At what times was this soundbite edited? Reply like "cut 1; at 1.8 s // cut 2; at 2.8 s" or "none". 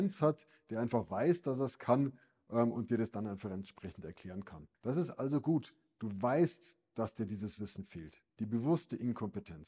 cut 1; at 4.7 s